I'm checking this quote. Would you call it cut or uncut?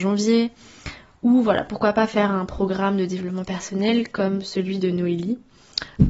uncut